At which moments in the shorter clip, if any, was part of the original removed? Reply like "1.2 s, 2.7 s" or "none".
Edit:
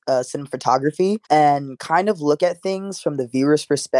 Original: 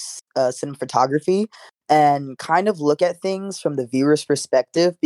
1.2 s